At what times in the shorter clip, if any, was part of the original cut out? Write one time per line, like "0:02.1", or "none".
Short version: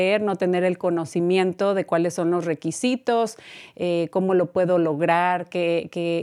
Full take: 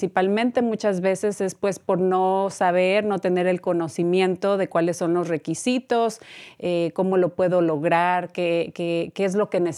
none